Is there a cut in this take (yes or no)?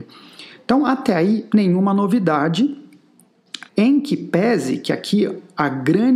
yes